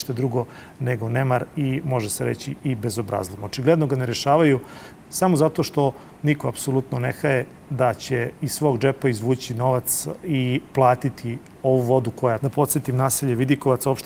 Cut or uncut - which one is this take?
cut